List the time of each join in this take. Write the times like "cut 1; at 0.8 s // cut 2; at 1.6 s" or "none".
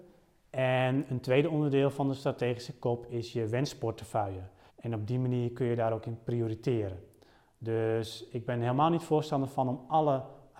cut 1; at 4.7 s